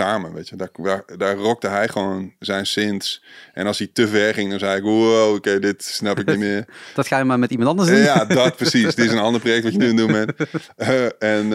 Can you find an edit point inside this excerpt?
no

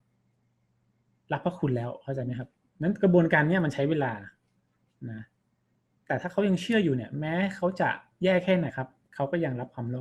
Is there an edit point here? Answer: yes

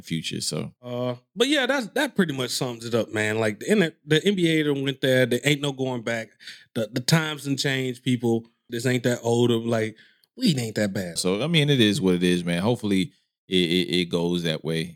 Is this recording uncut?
no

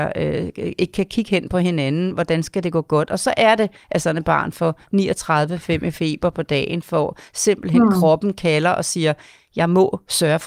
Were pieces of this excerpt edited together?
no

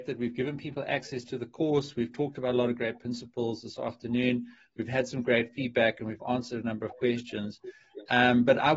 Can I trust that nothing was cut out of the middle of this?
yes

